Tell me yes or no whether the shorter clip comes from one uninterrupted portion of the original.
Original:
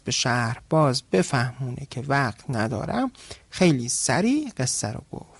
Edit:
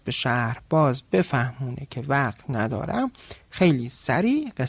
yes